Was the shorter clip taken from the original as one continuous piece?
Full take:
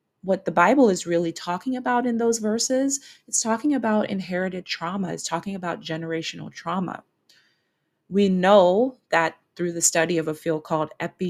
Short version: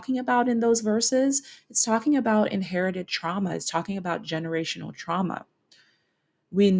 yes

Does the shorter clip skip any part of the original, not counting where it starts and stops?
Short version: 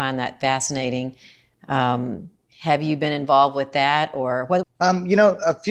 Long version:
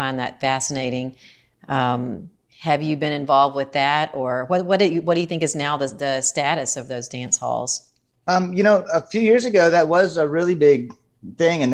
yes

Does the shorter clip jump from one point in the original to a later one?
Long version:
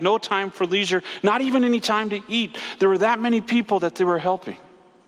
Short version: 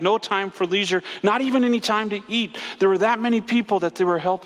no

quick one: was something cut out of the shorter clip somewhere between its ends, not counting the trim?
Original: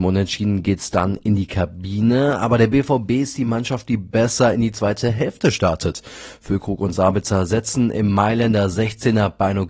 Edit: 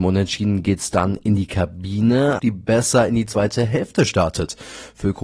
yes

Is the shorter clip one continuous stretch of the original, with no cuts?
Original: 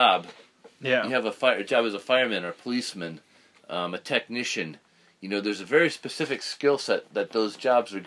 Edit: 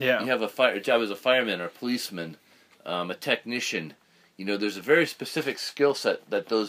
yes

